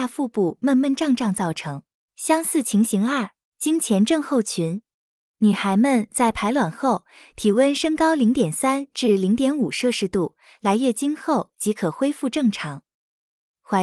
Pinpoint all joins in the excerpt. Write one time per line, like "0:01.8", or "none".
0:02.1
0:03.4